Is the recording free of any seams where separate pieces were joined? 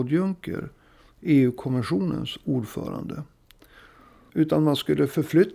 no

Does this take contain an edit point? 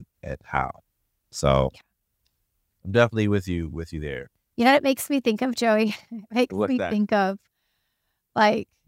no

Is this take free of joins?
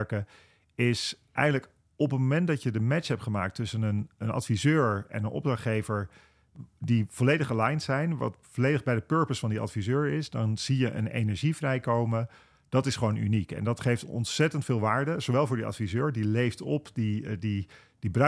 yes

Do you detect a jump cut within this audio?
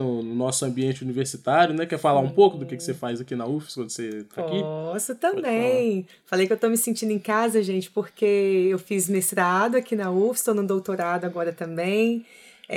no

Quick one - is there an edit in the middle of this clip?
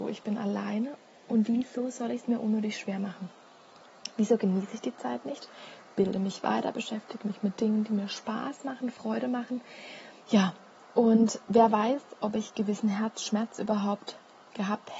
yes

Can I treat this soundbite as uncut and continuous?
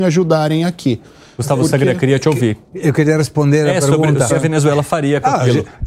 no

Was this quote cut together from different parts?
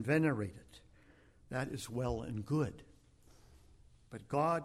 no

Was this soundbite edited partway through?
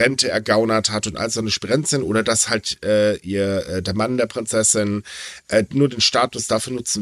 no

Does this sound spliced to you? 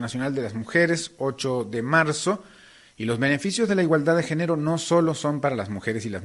yes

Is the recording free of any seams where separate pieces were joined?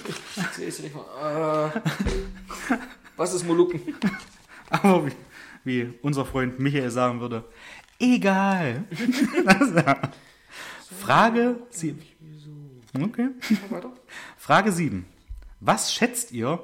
yes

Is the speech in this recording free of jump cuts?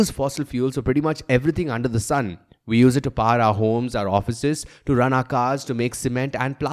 yes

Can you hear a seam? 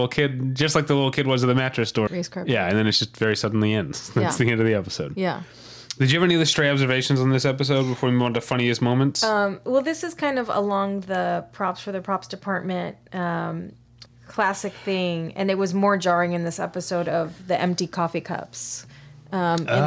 yes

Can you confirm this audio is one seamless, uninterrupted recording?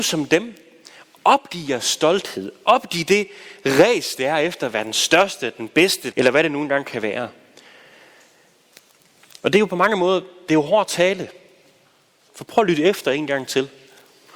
no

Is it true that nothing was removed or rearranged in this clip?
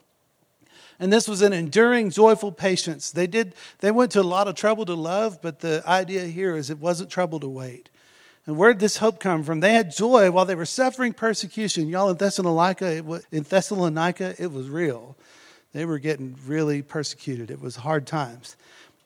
no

